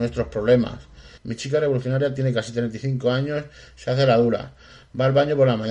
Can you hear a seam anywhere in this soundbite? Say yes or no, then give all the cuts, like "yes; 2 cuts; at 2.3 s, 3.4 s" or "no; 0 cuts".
yes; 1 cut; at 1.2 s